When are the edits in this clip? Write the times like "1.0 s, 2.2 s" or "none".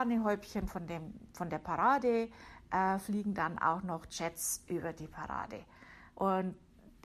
6.1 s

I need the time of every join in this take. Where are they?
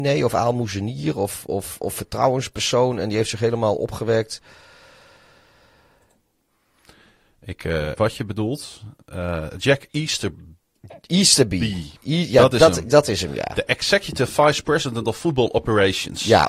8.0 s

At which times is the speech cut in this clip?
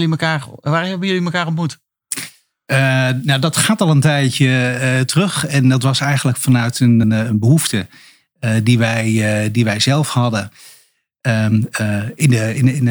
7.0 s

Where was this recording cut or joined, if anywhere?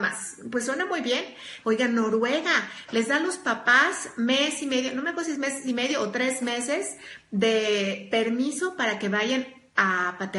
1.6 s

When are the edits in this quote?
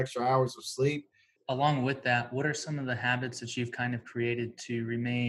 1.4 s

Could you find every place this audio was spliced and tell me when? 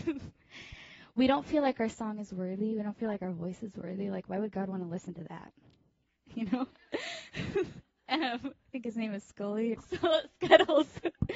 6.2 s, 9.7 s

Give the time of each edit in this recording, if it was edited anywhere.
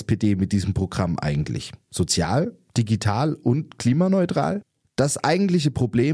none

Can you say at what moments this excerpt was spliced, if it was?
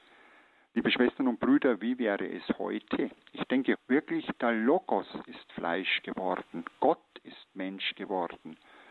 3.7 s

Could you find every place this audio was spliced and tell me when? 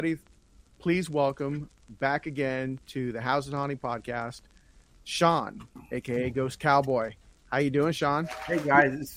none

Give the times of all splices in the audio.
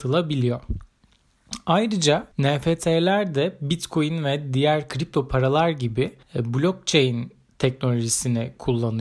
2.3 s, 6.2 s

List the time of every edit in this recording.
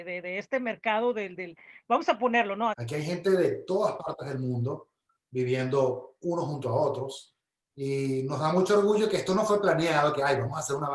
2.7 s

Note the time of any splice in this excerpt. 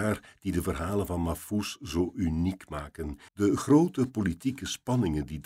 3.3 s

